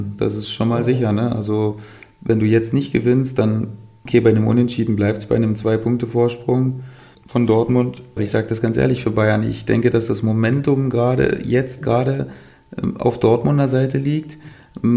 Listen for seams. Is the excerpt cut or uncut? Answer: cut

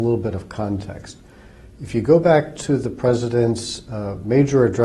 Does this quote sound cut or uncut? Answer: uncut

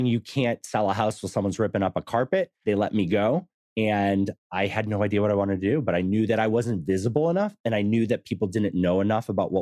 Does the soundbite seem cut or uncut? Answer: uncut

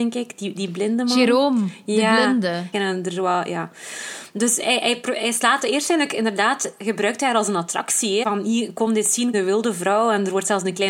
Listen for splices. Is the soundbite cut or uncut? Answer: cut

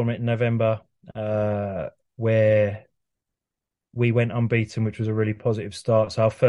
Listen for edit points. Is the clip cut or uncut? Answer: uncut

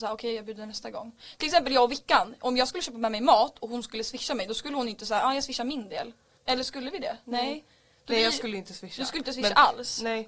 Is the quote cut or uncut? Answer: cut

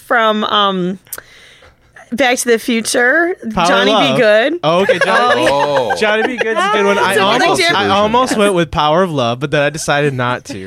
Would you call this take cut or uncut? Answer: cut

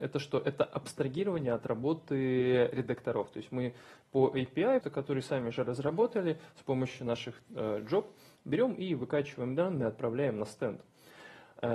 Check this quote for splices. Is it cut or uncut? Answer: cut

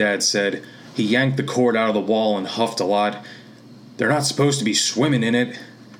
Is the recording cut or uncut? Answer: uncut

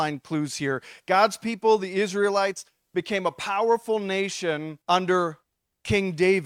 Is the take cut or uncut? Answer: cut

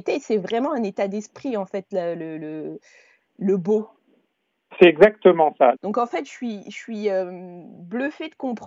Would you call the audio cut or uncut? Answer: cut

